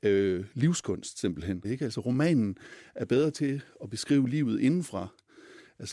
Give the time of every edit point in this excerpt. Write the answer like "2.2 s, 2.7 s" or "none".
1.6 s